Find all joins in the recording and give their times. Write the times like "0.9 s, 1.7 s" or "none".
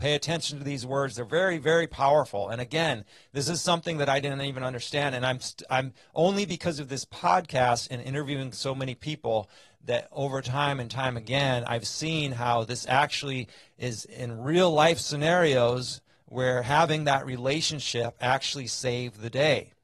none